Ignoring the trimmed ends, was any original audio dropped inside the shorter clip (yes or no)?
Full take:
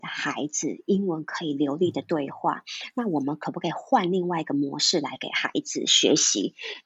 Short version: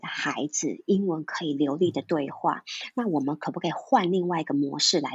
no